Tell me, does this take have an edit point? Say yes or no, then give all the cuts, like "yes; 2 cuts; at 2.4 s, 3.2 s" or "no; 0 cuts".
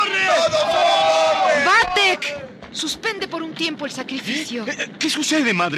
no; 0 cuts